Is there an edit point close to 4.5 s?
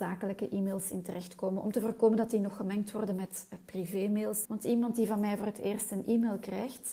yes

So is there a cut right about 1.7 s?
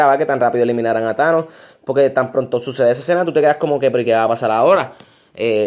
no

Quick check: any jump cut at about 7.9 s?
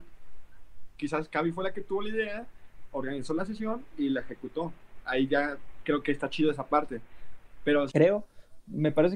yes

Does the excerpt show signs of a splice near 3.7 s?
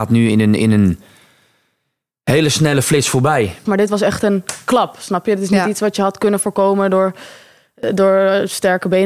yes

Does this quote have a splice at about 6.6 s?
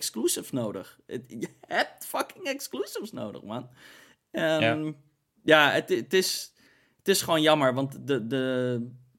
no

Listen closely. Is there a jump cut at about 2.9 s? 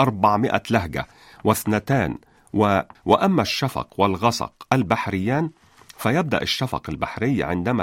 yes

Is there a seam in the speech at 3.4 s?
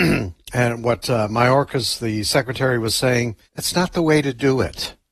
yes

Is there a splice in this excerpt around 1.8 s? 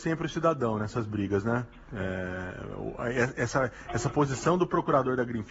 no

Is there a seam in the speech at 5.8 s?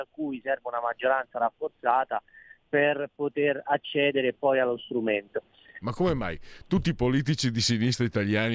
yes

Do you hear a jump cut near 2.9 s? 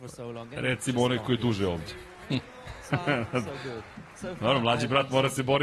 yes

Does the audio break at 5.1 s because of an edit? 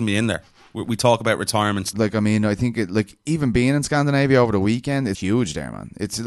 yes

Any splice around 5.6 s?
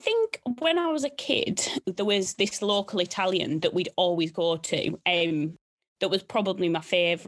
no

